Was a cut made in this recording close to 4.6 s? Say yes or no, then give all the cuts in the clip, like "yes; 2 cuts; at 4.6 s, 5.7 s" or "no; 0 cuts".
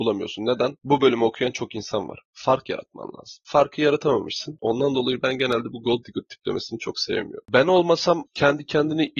yes; 1 cut; at 4.6 s